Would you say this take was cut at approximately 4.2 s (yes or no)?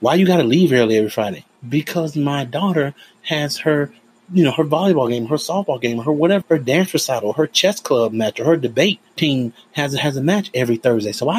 no